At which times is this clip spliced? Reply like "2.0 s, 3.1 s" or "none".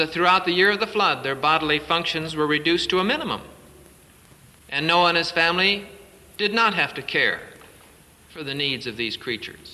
none